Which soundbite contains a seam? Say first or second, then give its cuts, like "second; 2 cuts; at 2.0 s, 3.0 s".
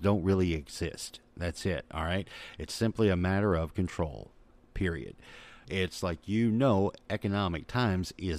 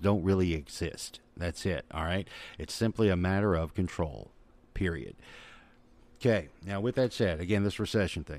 first; 1 cut; at 5.6 s